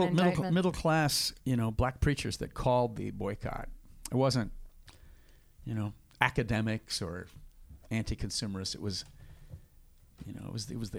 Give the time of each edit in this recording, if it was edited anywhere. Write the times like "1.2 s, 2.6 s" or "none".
1.4 s